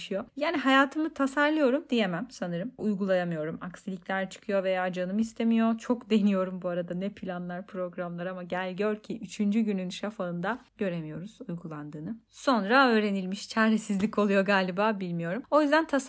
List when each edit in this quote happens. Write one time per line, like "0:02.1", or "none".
0:02.8